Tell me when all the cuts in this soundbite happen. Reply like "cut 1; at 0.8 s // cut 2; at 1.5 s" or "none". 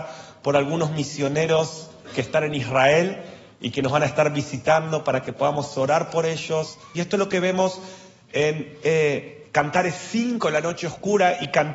cut 1; at 6.9 s